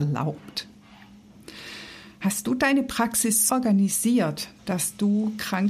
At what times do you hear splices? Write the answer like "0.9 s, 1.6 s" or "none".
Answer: 3.5 s, 4.6 s